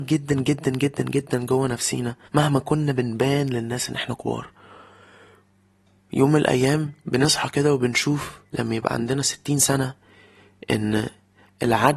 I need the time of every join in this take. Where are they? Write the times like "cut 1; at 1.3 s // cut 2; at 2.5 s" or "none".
cut 1; at 2.3 s // cut 2; at 7.0 s // cut 3; at 8.5 s